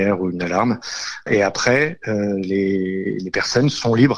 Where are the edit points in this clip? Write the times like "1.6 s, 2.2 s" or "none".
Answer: 1.3 s